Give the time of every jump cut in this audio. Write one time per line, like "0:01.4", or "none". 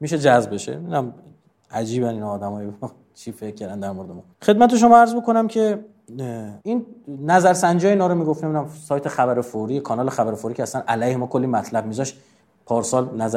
0:04.3
0:06.6